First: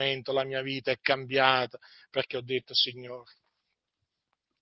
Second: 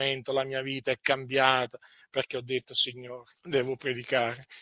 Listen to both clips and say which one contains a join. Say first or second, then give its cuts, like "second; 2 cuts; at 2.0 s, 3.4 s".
second; 1 cut; at 3.4 s